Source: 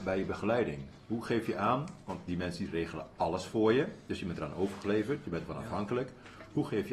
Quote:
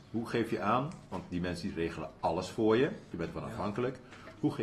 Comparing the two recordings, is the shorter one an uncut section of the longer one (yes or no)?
no